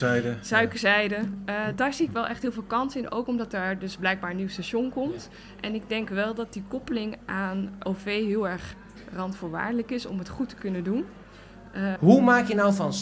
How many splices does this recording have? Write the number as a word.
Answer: two